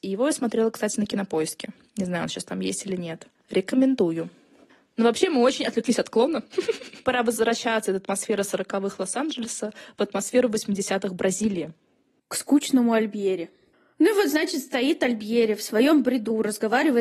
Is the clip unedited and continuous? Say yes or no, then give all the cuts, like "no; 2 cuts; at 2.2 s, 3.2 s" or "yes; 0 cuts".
yes; 0 cuts